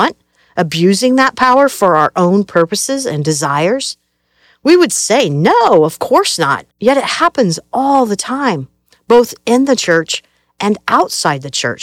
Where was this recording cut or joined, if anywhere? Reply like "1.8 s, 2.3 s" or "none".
6.7 s